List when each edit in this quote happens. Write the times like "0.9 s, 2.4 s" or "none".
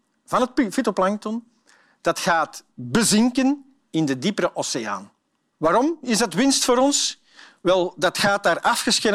5.5 s